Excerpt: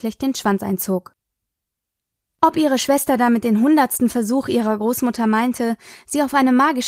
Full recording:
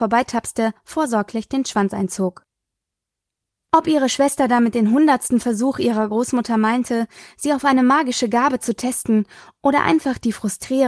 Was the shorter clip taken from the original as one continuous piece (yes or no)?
yes